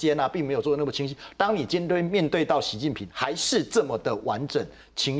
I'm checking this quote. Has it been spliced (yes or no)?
no